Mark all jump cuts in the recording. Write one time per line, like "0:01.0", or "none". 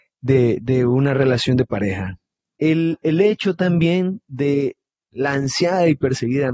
0:02.6
0:05.1